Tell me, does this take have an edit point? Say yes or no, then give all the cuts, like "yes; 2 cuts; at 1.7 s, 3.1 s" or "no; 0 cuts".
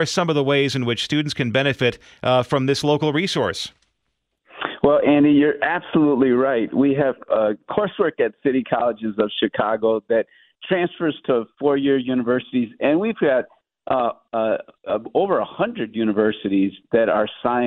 no; 0 cuts